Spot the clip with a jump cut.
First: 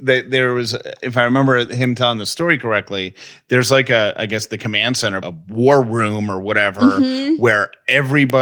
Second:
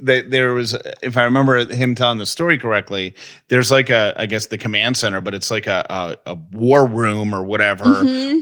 first; 1 cut; at 5.2 s

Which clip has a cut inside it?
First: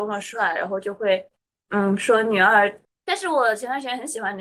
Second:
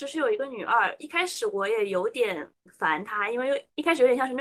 first; 1 cut; at 2.8 s

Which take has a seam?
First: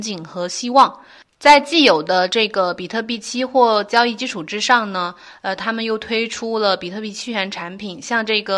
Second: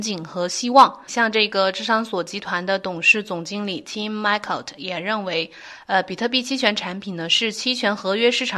second; 1 cut; at 1.1 s

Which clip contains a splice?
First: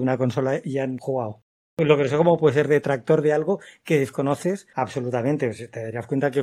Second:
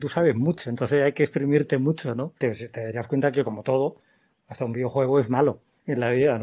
second; 1 cut; at 2.4 s

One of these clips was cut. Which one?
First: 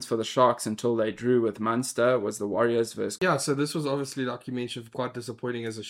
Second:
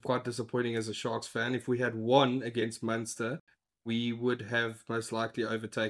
first; 1 cut; at 3.2 s

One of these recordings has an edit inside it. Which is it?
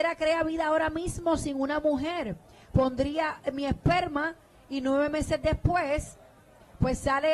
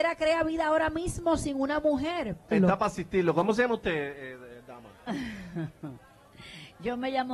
second; 1 cut; at 2.5 s

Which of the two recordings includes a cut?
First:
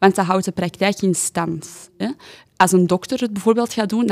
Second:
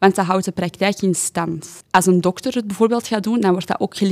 second; 1 cut; at 1.8 s

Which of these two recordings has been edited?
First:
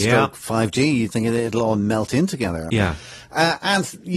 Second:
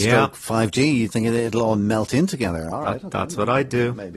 first; 1 cut; at 2.7 s

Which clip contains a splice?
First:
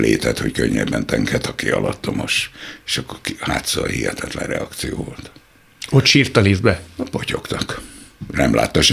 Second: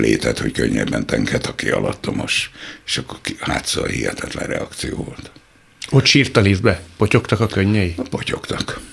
first; 1 cut; at 7.0 s

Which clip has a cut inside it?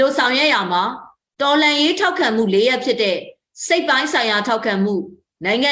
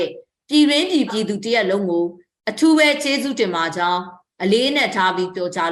second; 1 cut; at 1.1 s

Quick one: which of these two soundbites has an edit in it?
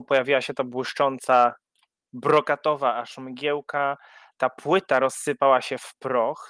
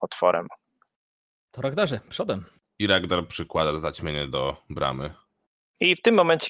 second; 1 cut; at 2.6 s

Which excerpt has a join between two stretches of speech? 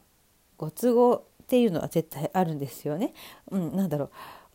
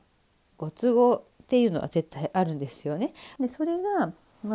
second; 1 cut; at 3.4 s

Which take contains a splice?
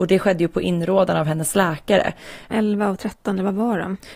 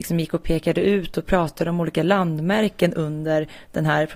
first; 1 cut; at 2.5 s

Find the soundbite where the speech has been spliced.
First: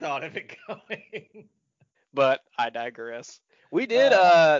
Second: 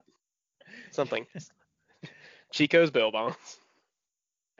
first; 1 cut; at 1.9 s

